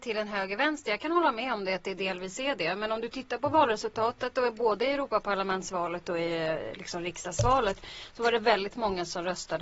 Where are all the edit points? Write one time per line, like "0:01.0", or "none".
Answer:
none